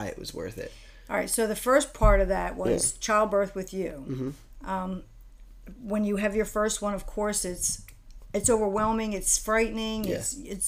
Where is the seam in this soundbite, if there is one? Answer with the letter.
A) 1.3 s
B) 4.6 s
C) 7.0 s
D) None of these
D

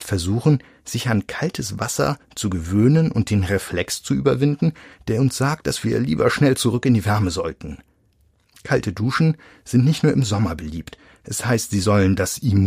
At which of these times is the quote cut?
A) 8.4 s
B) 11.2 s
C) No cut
C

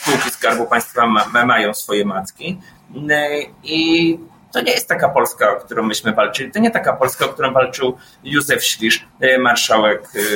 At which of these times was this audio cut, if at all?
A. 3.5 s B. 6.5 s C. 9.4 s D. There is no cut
D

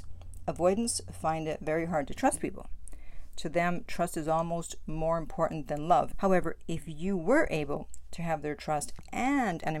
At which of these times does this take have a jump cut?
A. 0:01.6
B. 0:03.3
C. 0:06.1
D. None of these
C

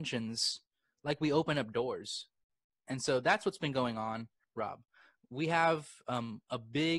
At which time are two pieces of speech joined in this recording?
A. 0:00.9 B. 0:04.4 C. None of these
B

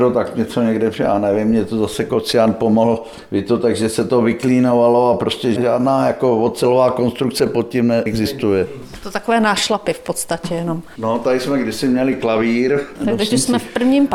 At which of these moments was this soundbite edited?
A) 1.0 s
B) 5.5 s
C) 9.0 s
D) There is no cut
B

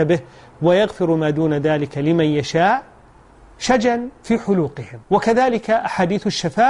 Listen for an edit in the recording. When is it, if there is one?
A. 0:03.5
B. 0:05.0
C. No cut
B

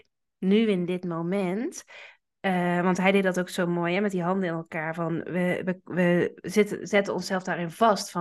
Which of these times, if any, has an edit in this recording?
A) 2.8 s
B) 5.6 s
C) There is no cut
C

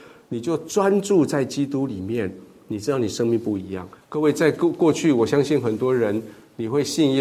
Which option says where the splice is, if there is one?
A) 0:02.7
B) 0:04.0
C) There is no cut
B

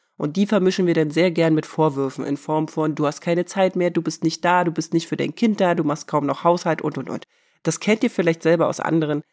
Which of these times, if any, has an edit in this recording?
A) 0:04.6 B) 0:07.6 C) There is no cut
C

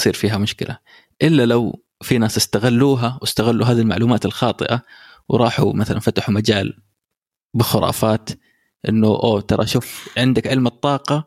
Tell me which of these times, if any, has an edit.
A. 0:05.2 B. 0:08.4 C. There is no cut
C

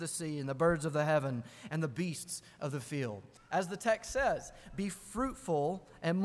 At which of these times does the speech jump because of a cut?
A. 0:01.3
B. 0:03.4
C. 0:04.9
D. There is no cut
B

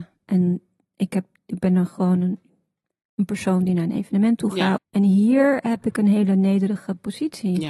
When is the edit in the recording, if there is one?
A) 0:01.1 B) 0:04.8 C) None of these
B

